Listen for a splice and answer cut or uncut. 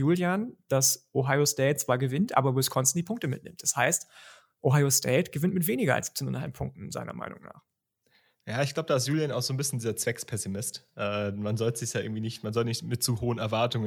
uncut